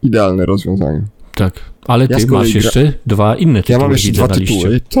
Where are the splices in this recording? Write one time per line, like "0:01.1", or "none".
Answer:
none